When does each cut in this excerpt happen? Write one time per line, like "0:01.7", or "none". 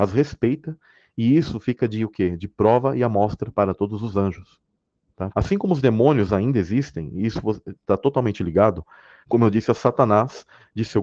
0:05.3
0:09.2